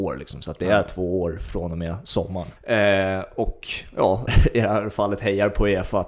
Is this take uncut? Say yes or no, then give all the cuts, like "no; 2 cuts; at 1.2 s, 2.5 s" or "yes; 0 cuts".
no; 2 cuts; at 2.6 s, 4.3 s